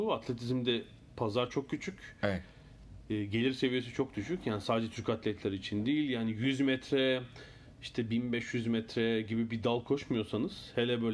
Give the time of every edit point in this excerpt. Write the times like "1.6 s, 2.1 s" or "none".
none